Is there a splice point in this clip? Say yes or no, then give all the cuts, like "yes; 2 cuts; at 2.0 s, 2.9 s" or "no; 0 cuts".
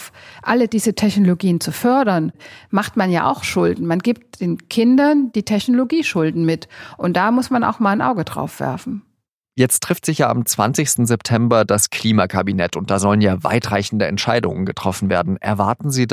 no; 0 cuts